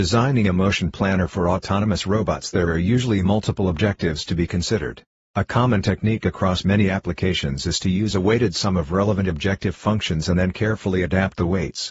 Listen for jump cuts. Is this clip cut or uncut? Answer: cut